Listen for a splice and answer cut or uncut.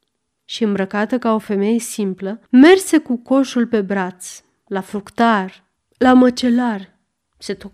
cut